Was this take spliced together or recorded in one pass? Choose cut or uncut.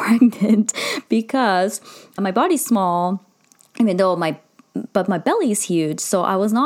cut